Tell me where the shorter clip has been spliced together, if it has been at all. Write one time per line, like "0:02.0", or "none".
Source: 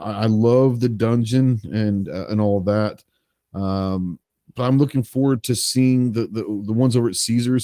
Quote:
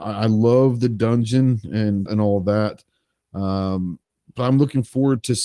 0:02.1